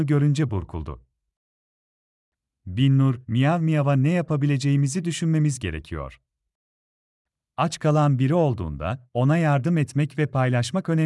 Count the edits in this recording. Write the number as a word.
one